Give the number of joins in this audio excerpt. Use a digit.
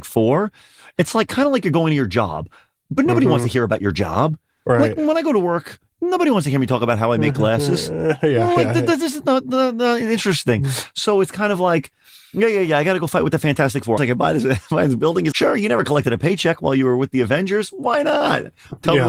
2